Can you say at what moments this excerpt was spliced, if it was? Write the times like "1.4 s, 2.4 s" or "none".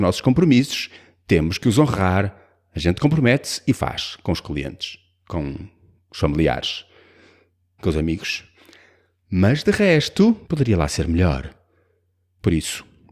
7.8 s, 10.4 s